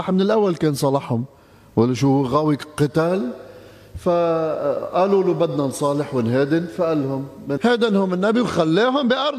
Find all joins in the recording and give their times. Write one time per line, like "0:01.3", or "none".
0:07.6